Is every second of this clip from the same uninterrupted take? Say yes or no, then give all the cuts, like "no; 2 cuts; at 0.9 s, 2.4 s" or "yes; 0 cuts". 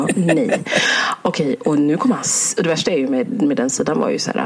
yes; 0 cuts